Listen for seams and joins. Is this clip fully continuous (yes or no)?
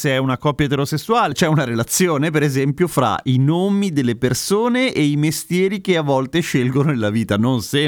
no